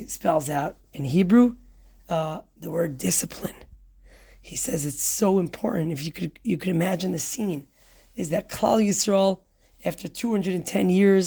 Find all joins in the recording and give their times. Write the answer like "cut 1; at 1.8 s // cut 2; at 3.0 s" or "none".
none